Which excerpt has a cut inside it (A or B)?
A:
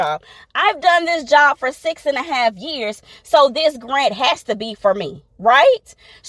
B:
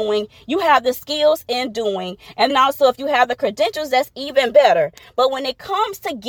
B